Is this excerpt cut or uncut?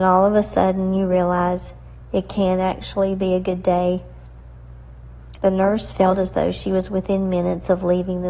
cut